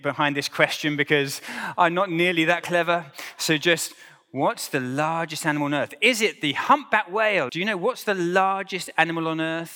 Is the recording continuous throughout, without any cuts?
no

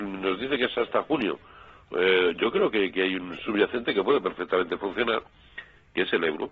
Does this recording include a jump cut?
no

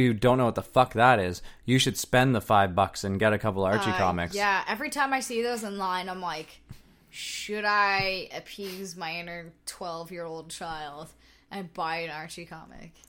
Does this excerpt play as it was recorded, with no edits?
yes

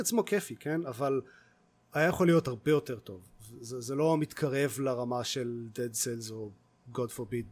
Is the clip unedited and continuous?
yes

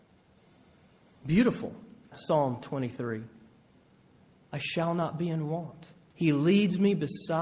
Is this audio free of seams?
no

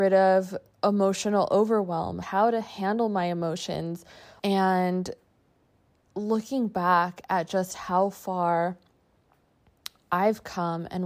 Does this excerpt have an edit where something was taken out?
yes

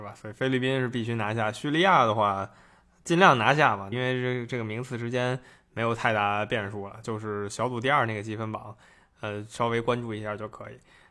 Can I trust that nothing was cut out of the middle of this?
no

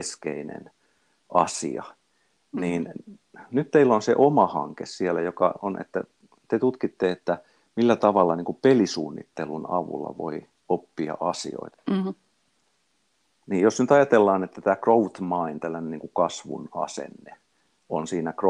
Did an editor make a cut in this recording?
yes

